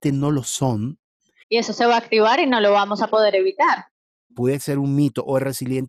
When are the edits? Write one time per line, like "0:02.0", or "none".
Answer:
0:01.4
0:04.3

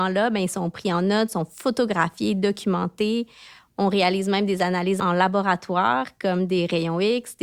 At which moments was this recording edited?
none

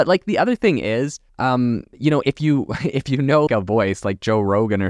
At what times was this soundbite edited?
0:01.3
0:03.5

